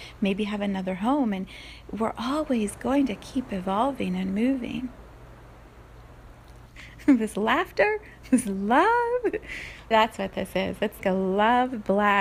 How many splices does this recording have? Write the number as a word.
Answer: three